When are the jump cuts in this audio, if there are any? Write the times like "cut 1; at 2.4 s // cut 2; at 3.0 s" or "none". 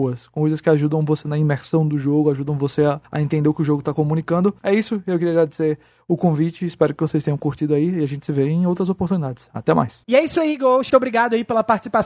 cut 1; at 4.6 s // cut 2; at 10.9 s